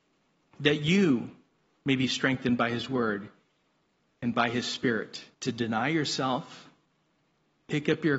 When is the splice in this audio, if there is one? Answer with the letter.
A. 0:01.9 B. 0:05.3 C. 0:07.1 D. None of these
B